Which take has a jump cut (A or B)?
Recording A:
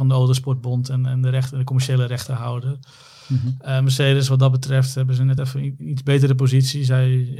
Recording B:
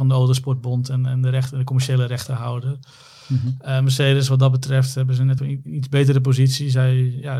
B